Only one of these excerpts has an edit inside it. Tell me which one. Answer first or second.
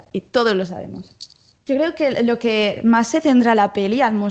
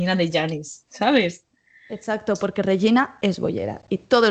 first